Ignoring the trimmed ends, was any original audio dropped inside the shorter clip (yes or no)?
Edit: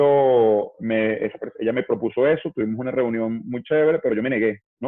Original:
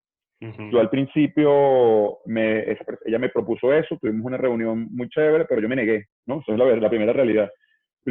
no